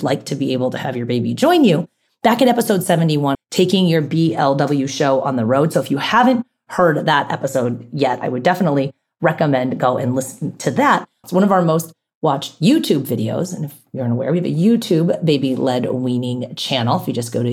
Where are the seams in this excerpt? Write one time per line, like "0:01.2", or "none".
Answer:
0:03.3
0:11.2